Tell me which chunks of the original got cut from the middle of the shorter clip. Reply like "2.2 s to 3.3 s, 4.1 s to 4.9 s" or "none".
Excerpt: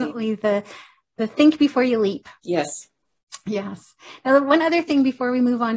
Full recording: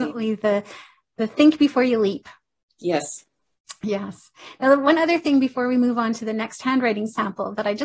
2.4 s to 2.7 s